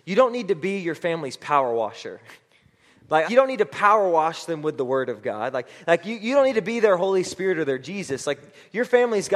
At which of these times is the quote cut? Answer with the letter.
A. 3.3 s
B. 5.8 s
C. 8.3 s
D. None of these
A